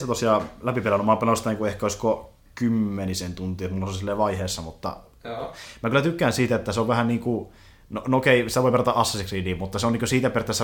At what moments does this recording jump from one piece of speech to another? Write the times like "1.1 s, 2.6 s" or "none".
none